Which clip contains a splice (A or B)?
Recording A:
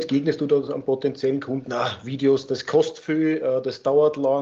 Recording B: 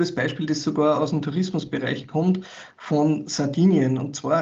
A